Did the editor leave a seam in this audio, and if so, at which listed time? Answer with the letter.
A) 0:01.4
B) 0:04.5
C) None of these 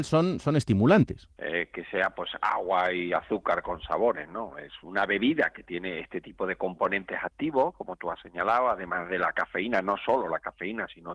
A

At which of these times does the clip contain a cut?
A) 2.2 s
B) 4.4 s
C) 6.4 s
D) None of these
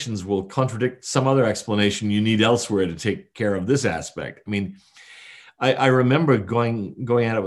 D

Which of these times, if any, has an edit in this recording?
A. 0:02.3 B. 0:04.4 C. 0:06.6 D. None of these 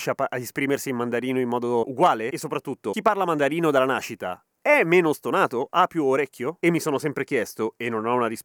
C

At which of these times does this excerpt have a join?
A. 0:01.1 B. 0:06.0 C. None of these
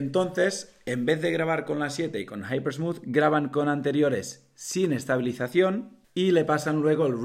B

